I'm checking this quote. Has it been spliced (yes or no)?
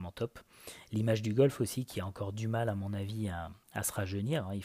yes